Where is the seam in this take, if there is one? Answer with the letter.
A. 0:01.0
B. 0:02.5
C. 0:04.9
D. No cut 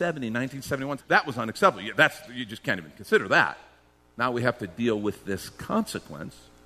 A